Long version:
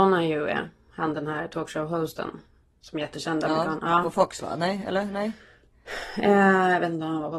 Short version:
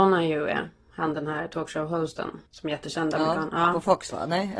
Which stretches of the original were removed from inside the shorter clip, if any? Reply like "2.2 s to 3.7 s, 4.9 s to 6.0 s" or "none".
2.5 s to 2.8 s